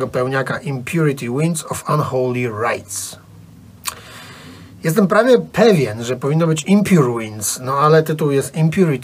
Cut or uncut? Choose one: uncut